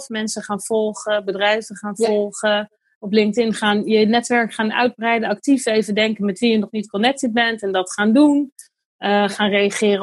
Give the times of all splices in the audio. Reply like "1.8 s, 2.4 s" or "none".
none